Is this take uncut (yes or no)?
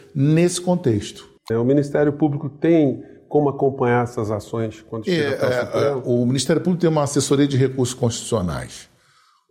no